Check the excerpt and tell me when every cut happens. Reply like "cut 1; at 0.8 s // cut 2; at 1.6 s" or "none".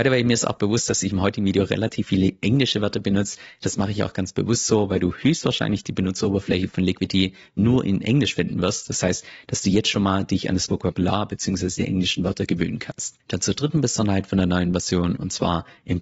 none